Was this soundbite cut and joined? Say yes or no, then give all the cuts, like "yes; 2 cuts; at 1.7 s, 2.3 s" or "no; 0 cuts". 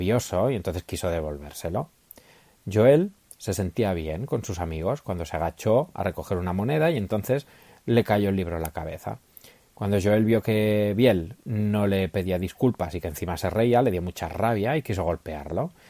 no; 0 cuts